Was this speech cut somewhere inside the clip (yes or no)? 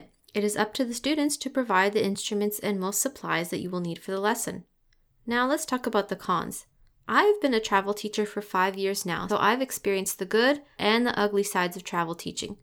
yes